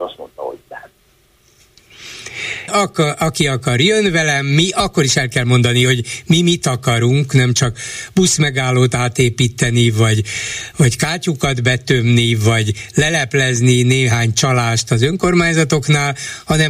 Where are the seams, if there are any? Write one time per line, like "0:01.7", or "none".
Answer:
0:02.7